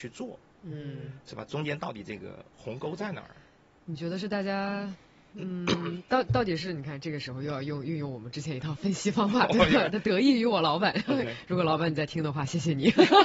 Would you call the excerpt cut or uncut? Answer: uncut